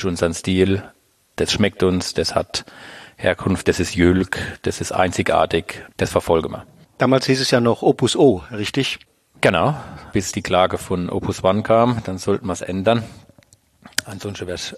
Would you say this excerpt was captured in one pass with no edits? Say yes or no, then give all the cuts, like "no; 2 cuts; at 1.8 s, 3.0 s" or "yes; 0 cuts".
no; 2 cuts; at 5.9 s, 10.1 s